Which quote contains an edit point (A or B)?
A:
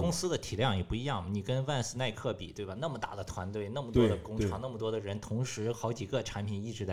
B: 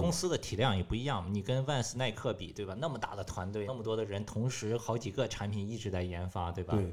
B